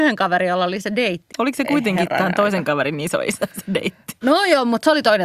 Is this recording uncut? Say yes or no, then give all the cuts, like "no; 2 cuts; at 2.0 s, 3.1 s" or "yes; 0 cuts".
no; 2 cuts; at 1.3 s, 4.2 s